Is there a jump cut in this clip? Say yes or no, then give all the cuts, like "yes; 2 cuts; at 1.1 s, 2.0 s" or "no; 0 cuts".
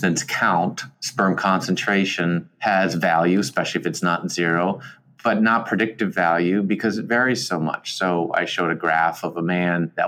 no; 0 cuts